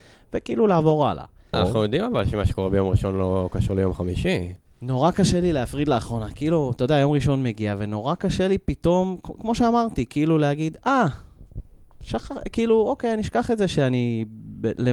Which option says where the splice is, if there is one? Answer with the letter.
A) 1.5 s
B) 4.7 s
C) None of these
A